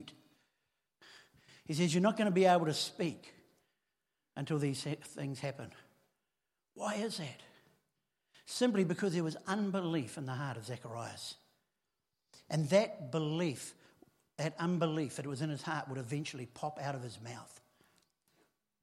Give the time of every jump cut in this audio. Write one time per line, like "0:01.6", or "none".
none